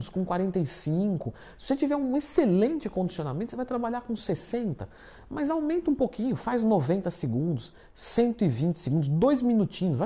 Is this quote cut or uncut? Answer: uncut